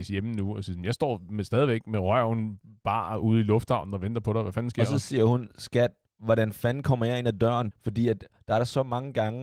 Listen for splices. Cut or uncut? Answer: cut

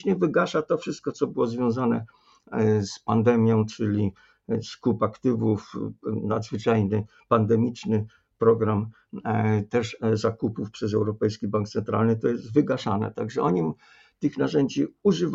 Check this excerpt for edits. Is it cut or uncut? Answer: uncut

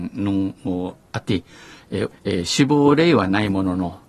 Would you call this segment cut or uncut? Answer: cut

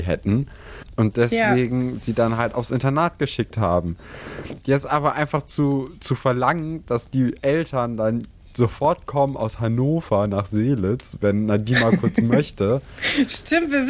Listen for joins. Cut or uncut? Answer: uncut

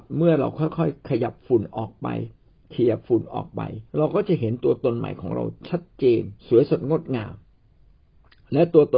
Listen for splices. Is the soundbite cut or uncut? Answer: cut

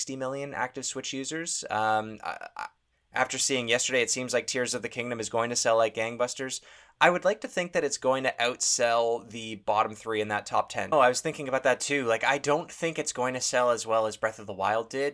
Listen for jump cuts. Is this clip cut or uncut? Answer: cut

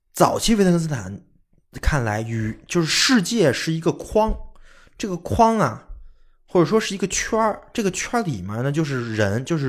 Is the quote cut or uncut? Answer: uncut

